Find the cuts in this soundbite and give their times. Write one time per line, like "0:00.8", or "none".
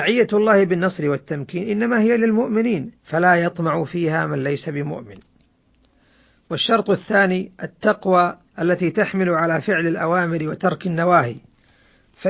0:03.0
0:08.5